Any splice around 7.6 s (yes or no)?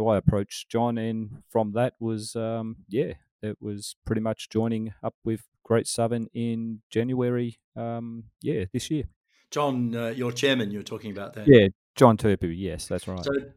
no